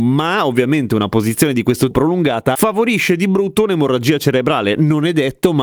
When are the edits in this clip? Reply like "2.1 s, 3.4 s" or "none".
1.9 s